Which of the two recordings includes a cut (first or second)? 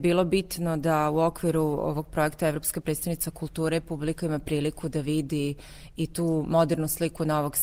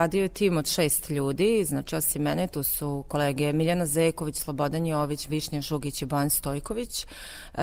second